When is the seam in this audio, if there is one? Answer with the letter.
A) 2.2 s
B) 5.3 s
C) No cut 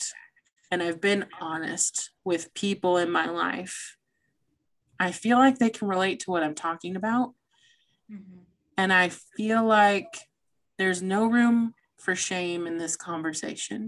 A